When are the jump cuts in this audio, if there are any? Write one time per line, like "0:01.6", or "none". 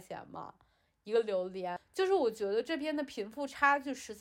0:01.8